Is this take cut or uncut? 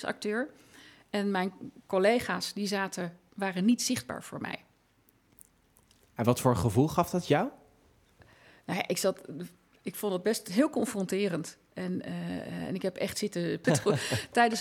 cut